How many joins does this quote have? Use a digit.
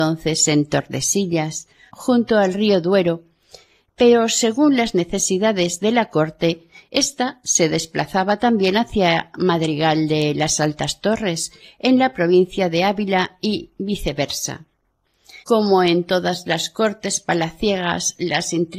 2